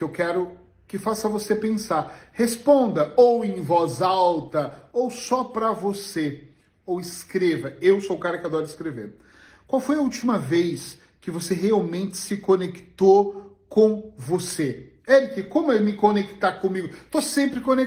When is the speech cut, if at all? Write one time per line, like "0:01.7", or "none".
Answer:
none

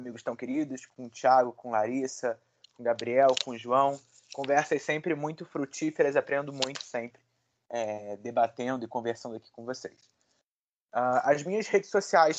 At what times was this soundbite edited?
none

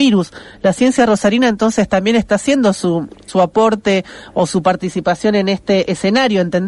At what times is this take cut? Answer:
0:03.3

